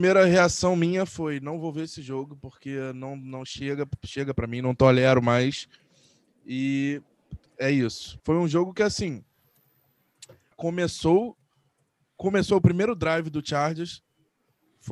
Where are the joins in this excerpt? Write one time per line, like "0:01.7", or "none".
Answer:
0:08.2
0:10.5